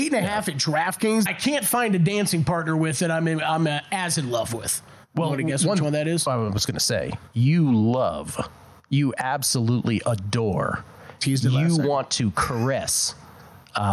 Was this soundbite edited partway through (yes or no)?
yes